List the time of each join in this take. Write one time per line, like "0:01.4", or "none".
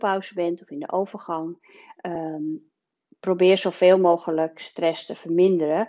none